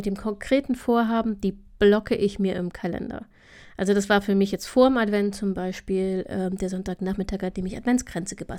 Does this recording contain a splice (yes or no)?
no